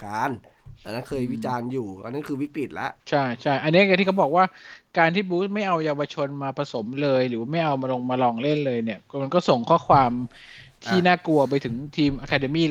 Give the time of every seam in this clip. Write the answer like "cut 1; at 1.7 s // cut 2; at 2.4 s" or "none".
cut 1; at 3.0 s